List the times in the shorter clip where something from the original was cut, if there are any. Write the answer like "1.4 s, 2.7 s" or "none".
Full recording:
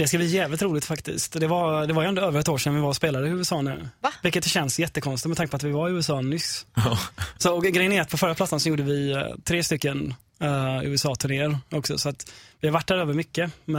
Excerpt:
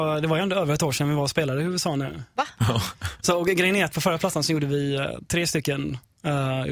2.5 s